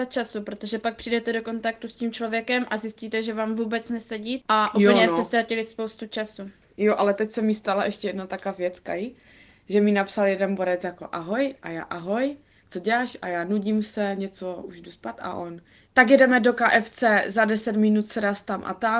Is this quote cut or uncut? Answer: uncut